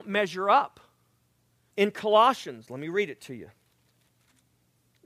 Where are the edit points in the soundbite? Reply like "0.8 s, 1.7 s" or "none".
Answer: 1.7 s